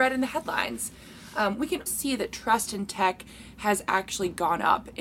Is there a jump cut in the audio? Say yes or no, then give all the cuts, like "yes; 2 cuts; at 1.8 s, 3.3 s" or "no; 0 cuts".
yes; 1 cut; at 1.9 s